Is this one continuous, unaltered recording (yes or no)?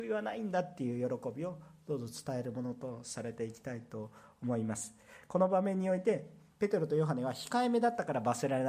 yes